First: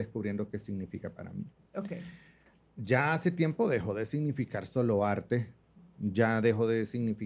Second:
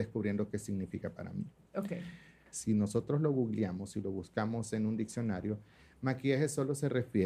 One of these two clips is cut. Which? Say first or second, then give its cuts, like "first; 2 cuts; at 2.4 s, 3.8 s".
second; 1 cut; at 2.5 s